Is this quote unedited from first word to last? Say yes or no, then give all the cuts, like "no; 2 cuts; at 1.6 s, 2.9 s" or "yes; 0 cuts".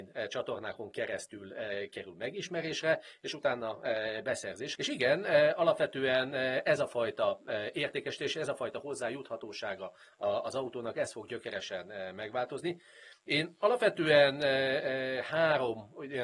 no; 1 cut; at 4.7 s